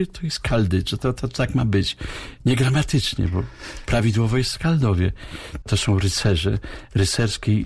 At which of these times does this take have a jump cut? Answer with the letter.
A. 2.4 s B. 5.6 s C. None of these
B